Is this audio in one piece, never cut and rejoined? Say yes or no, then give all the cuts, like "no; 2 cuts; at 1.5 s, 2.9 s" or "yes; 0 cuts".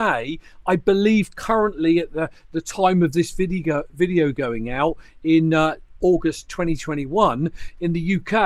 yes; 0 cuts